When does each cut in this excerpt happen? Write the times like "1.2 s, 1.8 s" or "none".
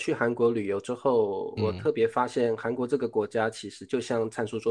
1.6 s